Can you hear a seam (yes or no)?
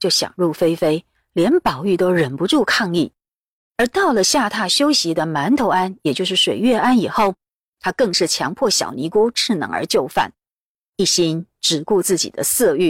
no